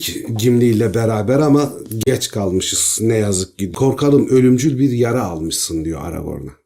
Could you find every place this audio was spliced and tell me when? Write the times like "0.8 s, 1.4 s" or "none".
none